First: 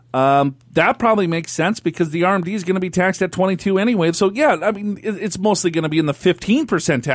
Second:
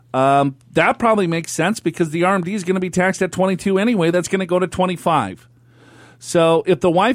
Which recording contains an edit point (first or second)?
first